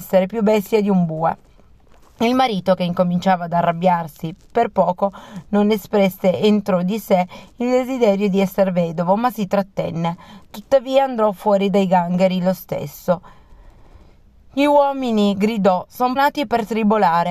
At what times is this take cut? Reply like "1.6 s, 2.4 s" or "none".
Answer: 16.2 s